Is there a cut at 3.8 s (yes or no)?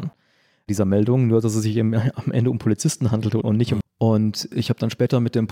yes